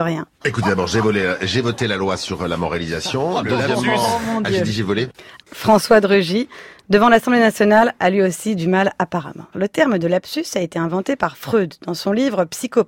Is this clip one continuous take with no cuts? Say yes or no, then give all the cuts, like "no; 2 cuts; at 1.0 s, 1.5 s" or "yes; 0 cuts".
no; 2 cuts; at 5.4 s, 9.5 s